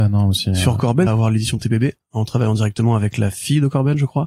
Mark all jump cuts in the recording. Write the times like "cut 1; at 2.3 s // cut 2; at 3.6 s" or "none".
cut 1; at 1.1 s